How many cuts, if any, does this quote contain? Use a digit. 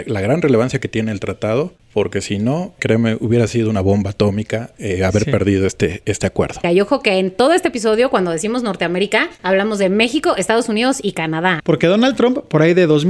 3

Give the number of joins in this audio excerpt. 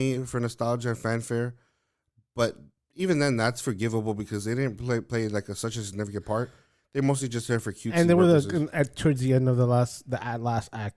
0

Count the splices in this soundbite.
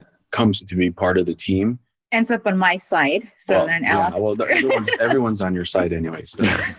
0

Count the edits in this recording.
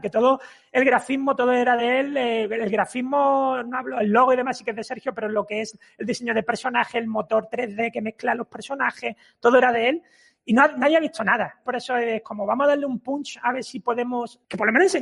1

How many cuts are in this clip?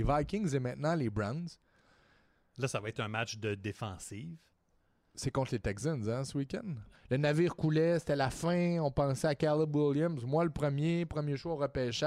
1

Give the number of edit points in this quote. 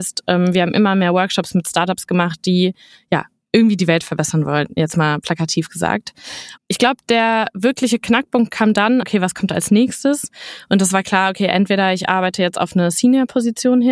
2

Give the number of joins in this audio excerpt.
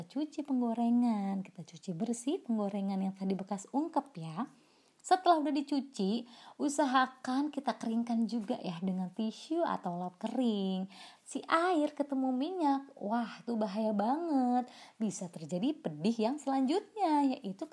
1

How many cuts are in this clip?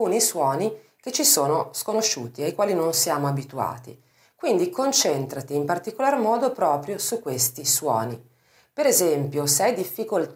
0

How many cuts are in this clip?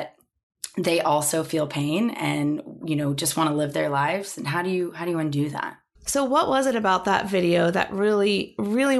1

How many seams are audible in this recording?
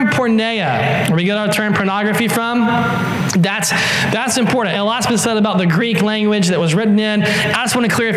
1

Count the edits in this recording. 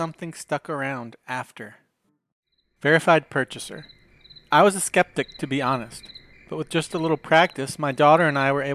0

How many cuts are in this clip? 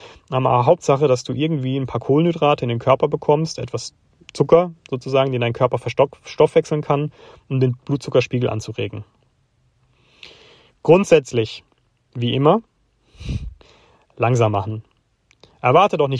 0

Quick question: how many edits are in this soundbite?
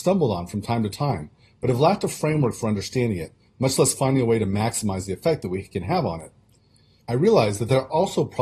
1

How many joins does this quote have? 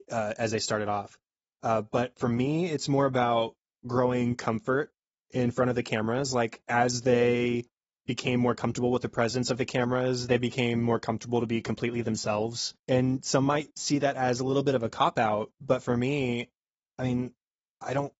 1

